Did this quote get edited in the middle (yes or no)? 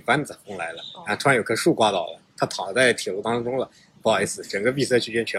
no